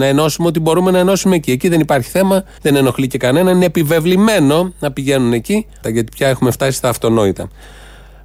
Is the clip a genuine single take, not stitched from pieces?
no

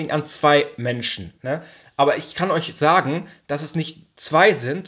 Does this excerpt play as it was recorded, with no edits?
yes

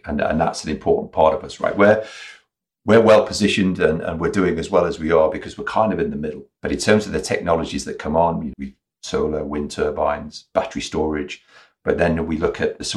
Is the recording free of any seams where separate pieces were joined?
no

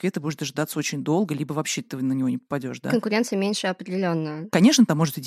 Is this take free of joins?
yes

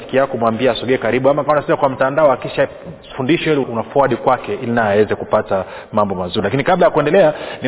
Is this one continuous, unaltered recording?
no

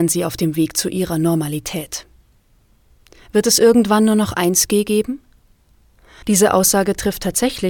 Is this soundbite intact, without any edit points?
no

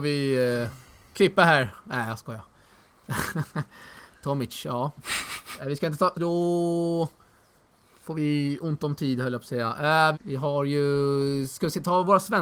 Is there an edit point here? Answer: yes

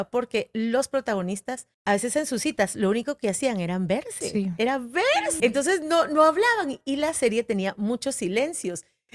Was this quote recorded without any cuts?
no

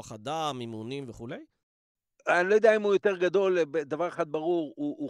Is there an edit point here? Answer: no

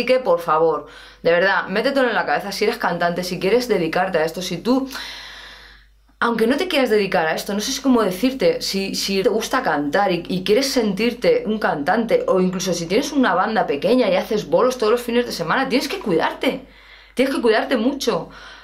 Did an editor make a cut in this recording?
yes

